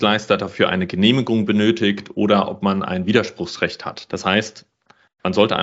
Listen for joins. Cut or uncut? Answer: cut